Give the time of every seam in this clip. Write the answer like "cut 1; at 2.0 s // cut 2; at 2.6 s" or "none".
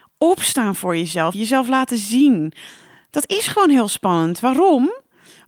cut 1; at 1.3 s